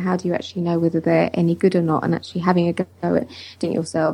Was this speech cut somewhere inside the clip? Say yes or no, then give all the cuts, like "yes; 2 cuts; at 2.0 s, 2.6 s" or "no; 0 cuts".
yes; 1 cut; at 2.9 s